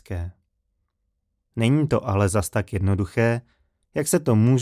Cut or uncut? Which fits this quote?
uncut